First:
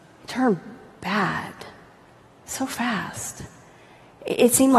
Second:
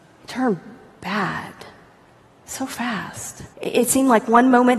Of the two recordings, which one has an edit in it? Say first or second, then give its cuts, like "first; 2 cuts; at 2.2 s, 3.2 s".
second; 1 cut; at 3.5 s